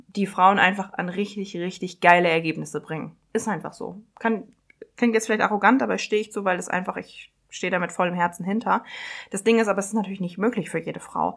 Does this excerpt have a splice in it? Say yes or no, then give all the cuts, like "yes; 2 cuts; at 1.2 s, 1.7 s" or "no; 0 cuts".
no; 0 cuts